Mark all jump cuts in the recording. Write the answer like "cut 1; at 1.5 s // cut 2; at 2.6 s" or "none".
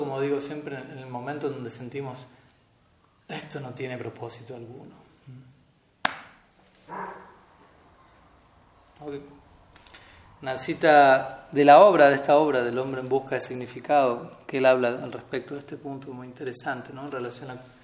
cut 1; at 6.9 s